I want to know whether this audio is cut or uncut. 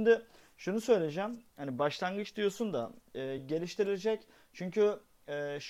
cut